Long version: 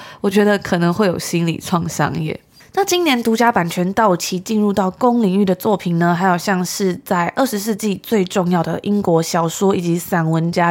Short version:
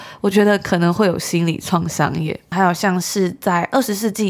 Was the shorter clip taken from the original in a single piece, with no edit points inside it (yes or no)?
no